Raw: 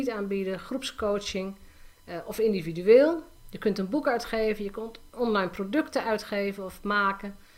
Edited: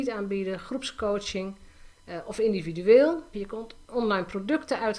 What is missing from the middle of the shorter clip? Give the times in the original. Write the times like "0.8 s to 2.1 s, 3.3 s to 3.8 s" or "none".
3.3 s to 4.6 s